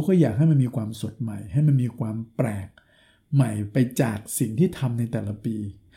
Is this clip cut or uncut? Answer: uncut